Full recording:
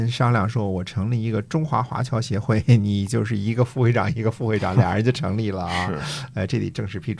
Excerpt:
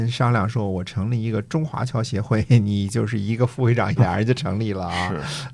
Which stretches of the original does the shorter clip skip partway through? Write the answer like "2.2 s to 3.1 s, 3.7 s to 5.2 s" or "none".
1.7 s to 1.8 s, 4.1 s to 4.7 s